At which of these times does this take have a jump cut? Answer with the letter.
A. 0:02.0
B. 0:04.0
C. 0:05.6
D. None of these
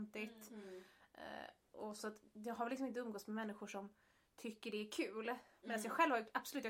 A